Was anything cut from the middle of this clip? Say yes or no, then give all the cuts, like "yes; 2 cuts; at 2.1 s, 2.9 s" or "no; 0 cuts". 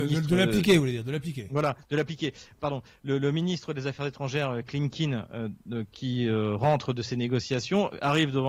no; 0 cuts